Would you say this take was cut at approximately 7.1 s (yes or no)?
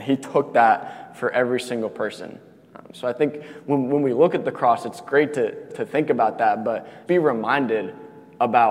yes